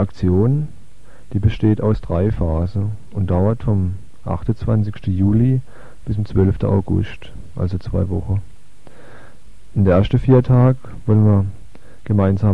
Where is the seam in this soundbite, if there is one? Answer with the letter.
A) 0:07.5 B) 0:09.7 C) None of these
C